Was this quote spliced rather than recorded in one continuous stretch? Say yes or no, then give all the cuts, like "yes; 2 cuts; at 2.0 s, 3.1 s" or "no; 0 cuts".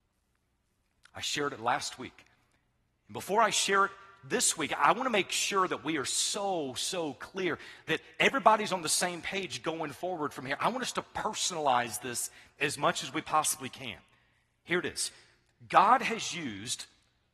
no; 0 cuts